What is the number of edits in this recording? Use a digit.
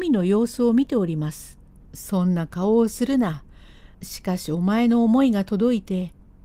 2